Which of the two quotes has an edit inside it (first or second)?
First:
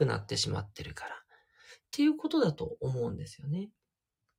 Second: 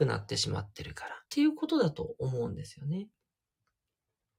second